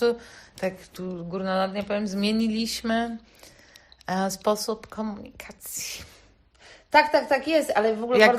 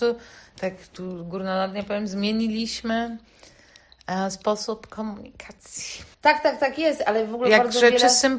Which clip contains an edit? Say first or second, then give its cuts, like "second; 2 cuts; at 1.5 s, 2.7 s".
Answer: second; 1 cut; at 6.1 s